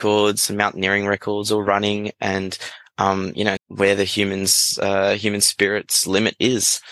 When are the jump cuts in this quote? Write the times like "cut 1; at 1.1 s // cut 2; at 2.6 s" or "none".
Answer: cut 1; at 3.6 s